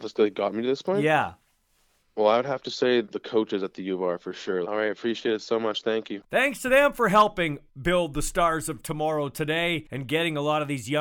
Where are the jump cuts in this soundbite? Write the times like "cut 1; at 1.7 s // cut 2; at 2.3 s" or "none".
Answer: cut 1; at 4.6 s // cut 2; at 6.2 s

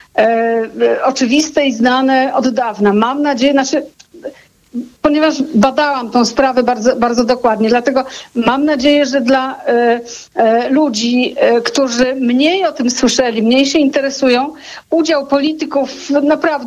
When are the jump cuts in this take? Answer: none

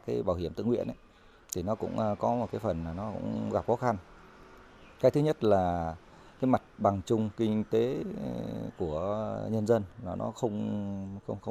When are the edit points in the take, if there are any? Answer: none

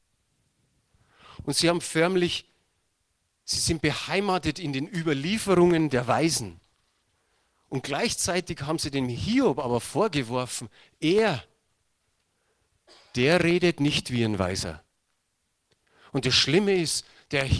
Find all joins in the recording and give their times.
none

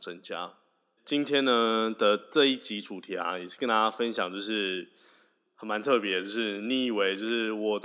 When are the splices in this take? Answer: cut 1; at 1.0 s

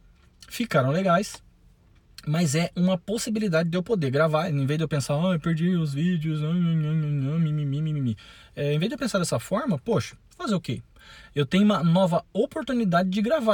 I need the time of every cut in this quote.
cut 1; at 10.2 s

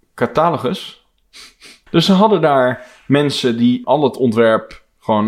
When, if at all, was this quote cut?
cut 1; at 1.9 s // cut 2; at 3.8 s

